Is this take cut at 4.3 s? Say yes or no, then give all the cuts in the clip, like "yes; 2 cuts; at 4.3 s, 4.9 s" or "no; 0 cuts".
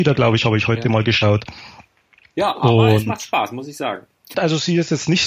yes; 1 cut; at 4.3 s